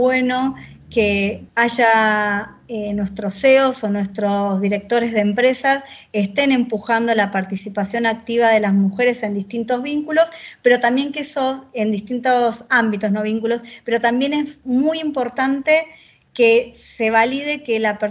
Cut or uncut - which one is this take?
uncut